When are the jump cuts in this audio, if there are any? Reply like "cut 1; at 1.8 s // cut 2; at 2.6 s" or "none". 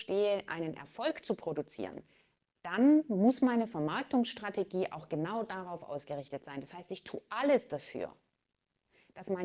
none